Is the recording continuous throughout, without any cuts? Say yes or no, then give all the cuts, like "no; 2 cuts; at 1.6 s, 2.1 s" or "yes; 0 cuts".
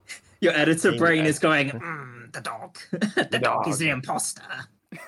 yes; 0 cuts